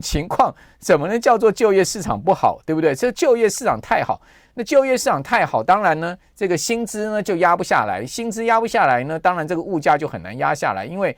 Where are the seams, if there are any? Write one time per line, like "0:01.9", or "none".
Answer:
none